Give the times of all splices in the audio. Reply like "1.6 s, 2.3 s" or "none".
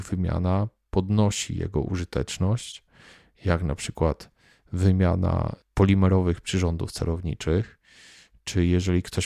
none